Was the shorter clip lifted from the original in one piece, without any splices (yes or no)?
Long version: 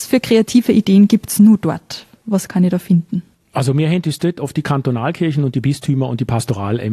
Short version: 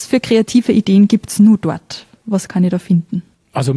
yes